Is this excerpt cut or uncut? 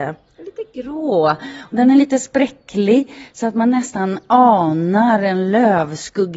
uncut